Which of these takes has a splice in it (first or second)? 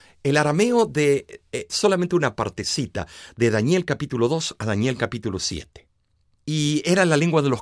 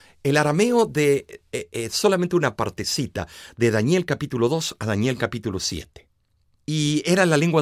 first